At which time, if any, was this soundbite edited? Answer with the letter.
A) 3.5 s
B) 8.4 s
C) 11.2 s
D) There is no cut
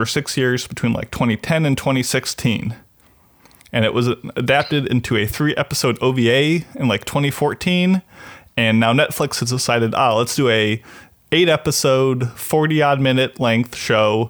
D